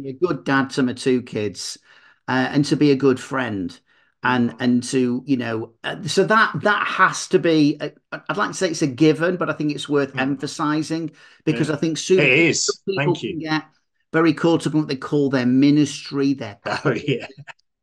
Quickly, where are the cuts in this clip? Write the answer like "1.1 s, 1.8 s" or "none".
none